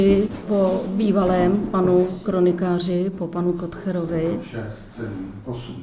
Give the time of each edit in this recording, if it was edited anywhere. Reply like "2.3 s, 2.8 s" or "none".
none